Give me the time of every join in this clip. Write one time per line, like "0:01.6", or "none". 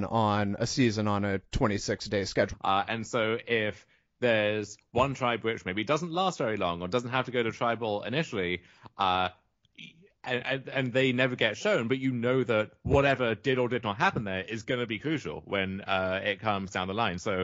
0:02.5